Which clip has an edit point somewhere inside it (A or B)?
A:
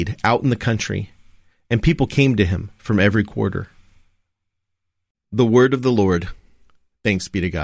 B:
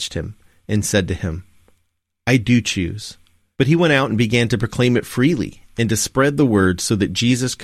B